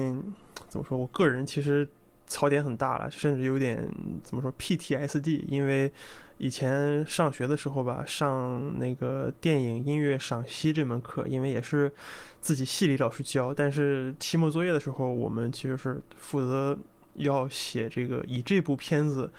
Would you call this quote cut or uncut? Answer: uncut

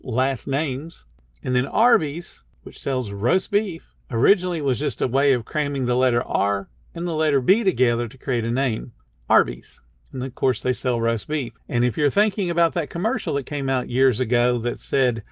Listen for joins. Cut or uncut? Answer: uncut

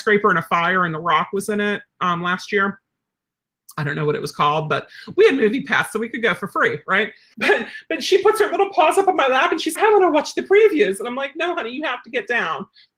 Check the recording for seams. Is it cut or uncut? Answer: cut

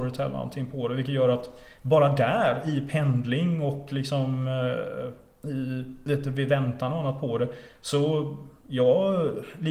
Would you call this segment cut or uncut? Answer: uncut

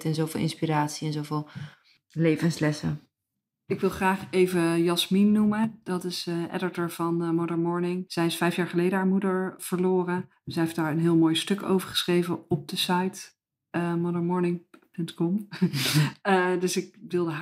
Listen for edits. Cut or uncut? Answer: uncut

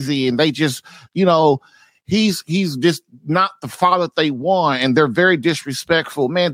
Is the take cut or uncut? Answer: uncut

